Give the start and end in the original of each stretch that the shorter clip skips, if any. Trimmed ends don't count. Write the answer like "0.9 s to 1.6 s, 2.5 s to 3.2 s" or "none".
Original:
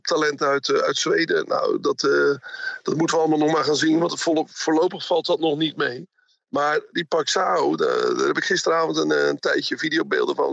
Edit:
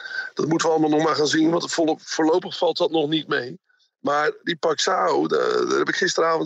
none